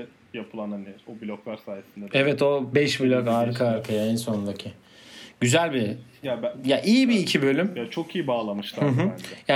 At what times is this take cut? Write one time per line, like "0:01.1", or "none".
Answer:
none